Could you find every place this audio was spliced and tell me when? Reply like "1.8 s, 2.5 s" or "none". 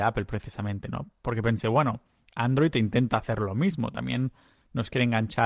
none